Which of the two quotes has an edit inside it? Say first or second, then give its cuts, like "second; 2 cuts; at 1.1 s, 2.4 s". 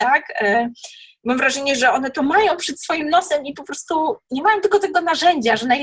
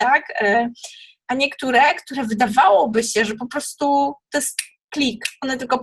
second; 1 cut; at 1.2 s